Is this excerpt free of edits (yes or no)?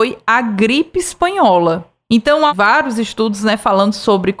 yes